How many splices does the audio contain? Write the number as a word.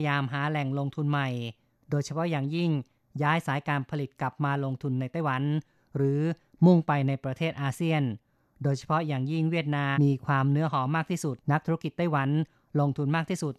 two